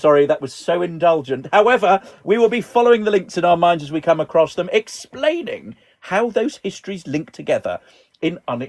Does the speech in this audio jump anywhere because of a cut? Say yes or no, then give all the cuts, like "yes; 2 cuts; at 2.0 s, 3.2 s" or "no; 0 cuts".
yes; 1 cut; at 2.2 s